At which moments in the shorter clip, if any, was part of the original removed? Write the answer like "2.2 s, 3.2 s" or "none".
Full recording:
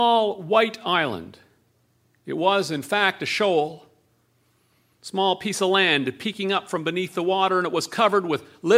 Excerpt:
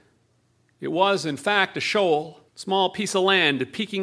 2.5 s